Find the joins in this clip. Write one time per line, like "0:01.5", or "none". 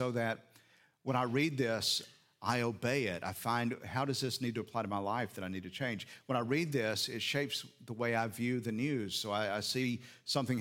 none